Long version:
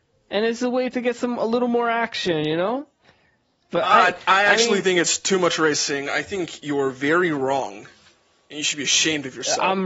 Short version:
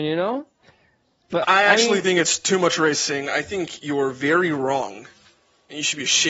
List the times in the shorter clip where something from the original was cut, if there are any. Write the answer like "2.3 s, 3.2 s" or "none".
1.4 s